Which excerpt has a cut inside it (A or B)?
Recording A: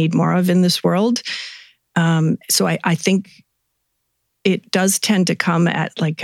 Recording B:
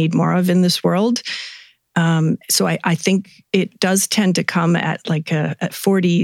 B